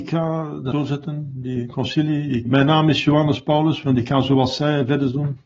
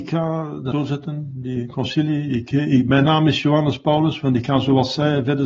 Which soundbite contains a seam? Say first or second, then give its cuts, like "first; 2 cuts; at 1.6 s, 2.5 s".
first; 1 cut; at 2.5 s